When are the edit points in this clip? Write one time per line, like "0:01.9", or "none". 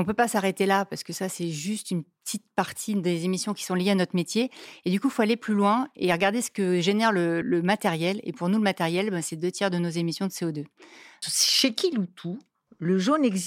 0:07.4
0:11.2